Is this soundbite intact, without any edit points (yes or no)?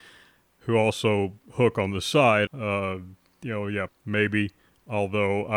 no